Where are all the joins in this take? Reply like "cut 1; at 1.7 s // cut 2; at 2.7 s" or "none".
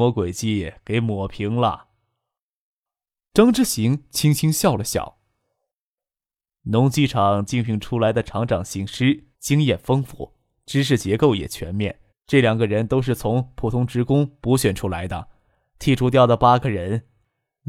cut 1; at 9.3 s // cut 2; at 12.1 s